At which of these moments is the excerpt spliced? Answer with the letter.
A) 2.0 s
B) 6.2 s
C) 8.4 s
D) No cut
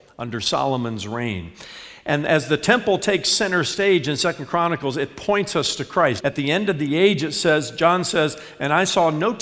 B